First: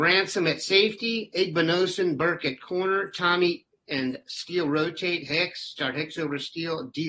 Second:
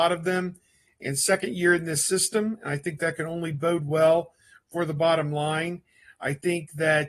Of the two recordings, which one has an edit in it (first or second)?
first